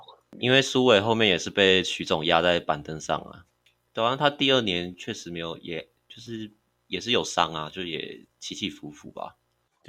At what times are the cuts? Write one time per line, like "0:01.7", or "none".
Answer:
none